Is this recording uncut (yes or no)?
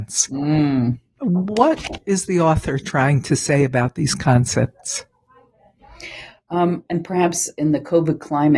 no